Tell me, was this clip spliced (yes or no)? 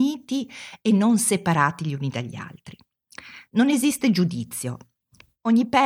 no